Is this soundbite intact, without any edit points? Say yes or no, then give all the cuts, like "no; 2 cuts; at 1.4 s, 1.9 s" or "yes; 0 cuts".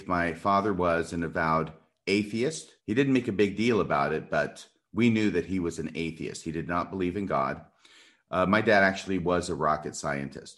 no; 1 cut; at 2.8 s